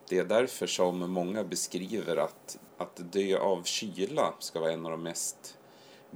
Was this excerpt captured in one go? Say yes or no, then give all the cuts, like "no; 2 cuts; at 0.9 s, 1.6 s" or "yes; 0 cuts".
no; 1 cut; at 2.7 s